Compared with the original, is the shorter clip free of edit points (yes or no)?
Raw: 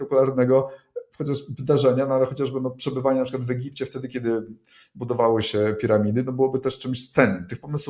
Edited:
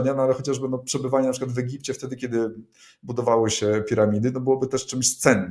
yes